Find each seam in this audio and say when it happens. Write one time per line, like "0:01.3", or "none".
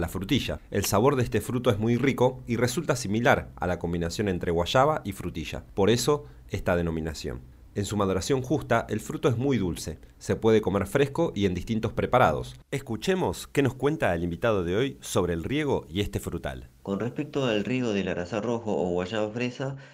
0:12.6